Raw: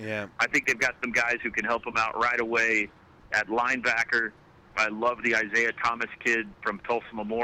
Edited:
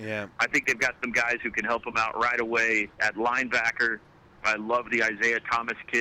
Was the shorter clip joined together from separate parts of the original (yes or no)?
yes